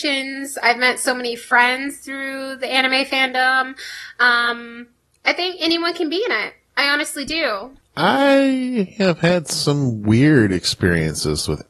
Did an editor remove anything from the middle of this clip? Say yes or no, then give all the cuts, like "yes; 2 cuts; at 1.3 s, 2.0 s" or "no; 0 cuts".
yes; 1 cut; at 7.8 s